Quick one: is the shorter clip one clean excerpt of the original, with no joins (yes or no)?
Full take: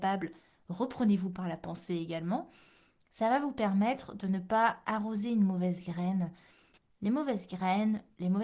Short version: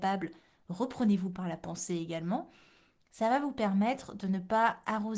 yes